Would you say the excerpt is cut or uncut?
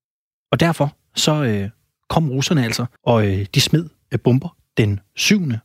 cut